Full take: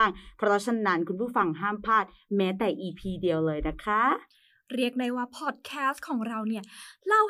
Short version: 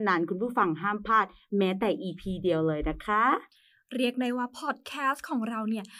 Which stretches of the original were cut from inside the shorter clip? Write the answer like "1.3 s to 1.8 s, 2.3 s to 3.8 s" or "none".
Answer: none